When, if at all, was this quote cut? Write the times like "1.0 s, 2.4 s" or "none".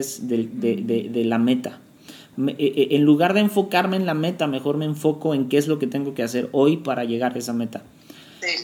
2.3 s